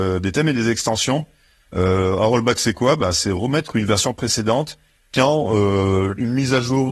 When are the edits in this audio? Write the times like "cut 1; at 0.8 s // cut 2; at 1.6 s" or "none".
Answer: none